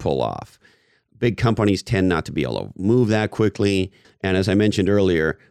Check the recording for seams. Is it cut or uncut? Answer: cut